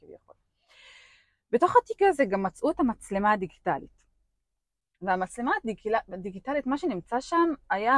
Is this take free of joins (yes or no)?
yes